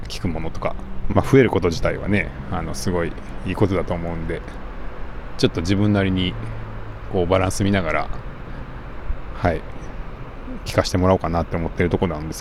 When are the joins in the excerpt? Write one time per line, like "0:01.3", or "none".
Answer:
0:01.1